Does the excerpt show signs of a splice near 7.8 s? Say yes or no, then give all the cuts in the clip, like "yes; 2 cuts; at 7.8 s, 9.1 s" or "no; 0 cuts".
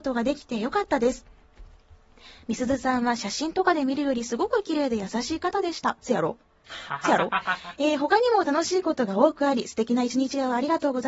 no; 0 cuts